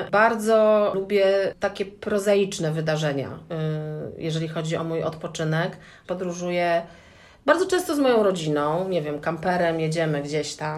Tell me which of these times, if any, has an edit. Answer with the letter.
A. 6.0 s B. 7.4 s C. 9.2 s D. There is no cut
A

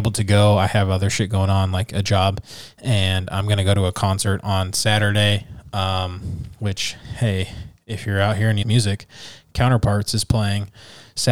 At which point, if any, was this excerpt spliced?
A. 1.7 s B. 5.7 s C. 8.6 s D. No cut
C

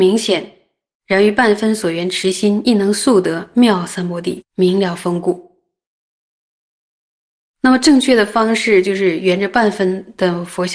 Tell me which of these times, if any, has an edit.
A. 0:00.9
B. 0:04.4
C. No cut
B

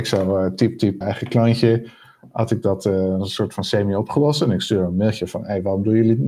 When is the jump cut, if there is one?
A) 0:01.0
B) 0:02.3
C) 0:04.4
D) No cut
A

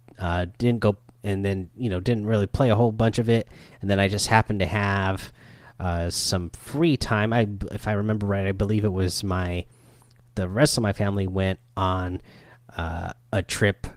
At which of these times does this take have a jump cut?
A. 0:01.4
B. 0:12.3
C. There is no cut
C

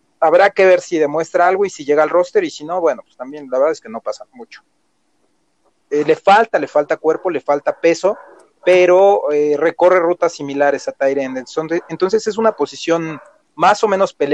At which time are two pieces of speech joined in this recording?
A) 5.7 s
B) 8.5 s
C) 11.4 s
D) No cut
A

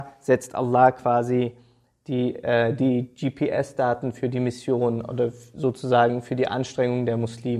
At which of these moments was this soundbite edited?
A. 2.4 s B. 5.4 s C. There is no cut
C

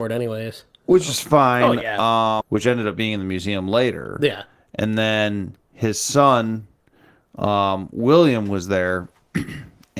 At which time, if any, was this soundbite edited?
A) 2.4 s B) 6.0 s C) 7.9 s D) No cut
A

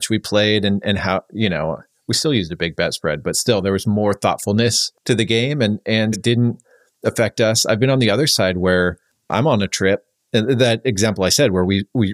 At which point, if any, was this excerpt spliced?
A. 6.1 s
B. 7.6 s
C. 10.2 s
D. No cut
A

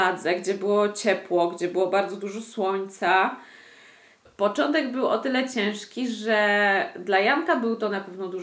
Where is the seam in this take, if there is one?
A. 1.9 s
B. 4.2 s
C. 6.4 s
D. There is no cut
B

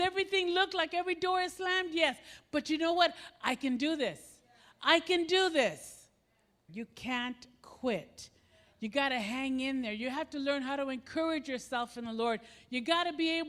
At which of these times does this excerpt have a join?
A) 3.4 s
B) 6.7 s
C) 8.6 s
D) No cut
B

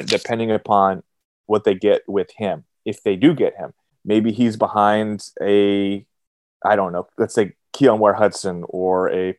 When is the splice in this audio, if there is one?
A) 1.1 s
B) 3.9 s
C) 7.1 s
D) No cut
B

